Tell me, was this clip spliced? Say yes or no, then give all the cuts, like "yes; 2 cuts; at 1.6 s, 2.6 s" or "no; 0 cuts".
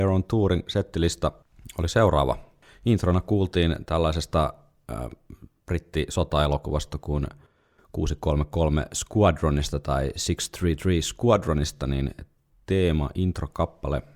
no; 0 cuts